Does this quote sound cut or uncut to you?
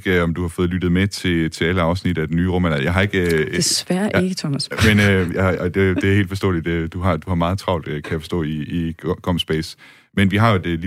uncut